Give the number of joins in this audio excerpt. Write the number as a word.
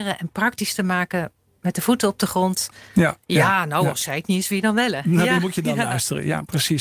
one